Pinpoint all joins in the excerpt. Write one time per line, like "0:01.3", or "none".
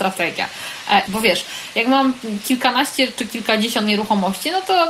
0:01.1